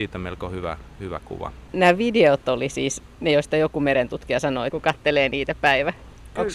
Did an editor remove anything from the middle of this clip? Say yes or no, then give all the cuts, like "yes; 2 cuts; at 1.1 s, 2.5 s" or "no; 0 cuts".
yes; 2 cuts; at 1.7 s, 4.7 s